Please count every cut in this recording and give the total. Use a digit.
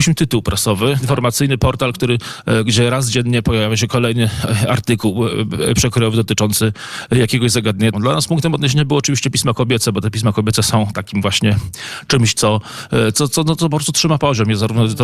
2